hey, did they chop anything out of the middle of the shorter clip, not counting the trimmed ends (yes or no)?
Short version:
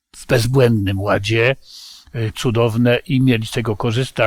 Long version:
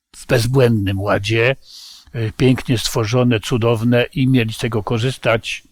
yes